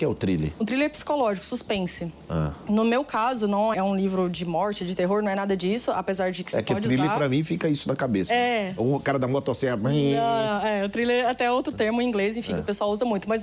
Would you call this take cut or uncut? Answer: cut